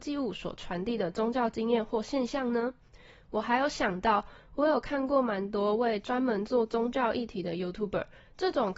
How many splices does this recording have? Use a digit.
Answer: 0